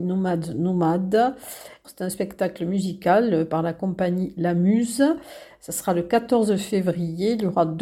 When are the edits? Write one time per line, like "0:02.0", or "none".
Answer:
0:01.8